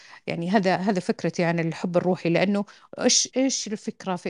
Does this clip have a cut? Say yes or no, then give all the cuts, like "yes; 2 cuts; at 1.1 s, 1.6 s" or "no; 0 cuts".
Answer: yes; 1 cut; at 3.3 s